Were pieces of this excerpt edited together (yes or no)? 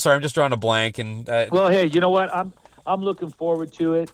no